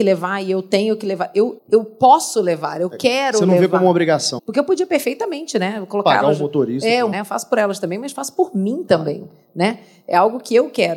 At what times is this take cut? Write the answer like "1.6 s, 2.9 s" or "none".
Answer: 1.6 s, 4.4 s, 7.1 s